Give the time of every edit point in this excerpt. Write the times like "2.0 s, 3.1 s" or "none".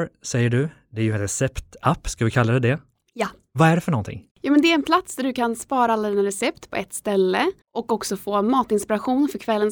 4.3 s, 7.6 s